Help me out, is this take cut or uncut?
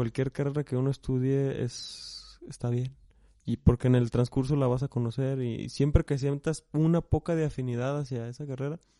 uncut